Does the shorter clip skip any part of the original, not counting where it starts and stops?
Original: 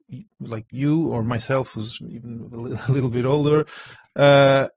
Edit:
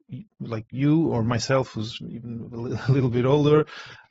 no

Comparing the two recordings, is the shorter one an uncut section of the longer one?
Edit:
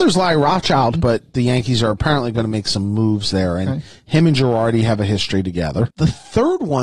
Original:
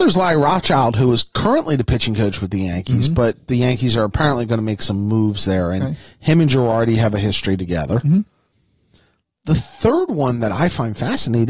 no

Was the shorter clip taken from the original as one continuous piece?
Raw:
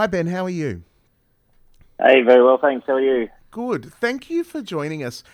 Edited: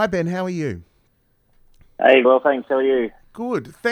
no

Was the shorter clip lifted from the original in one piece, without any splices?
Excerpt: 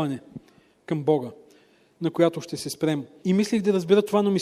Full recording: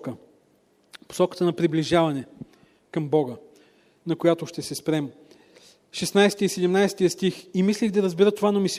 no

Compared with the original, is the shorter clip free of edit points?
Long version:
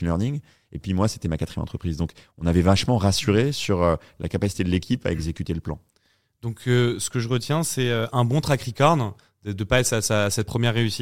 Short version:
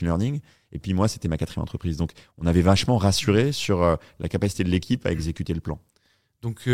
yes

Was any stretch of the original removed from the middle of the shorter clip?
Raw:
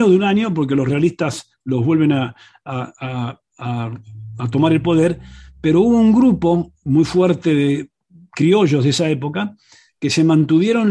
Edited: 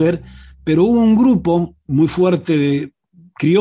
no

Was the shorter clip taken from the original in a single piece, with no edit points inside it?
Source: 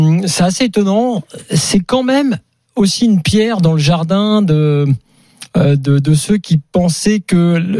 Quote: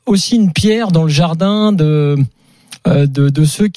yes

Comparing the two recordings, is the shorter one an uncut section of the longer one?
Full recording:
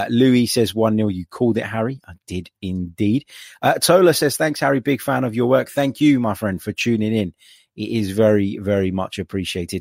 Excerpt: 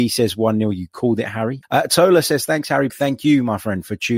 no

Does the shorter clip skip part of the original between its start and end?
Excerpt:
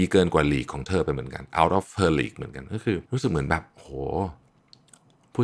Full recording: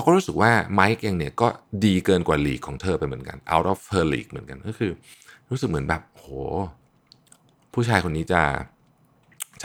yes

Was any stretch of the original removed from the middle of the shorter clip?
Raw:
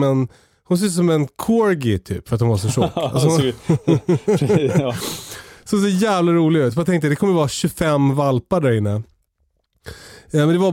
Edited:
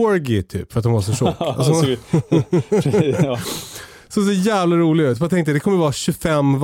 no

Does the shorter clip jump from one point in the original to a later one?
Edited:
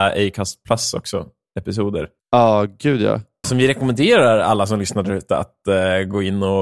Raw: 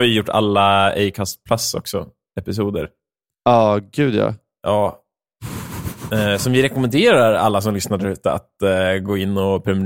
yes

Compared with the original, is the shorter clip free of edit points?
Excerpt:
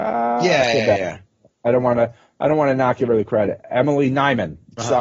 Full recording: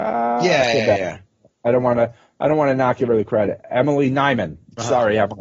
yes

